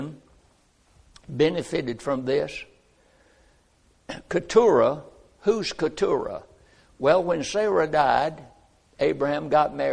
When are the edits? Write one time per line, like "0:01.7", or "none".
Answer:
none